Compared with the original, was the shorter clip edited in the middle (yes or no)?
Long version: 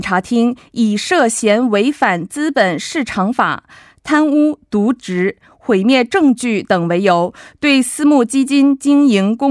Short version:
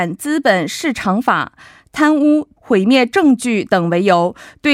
yes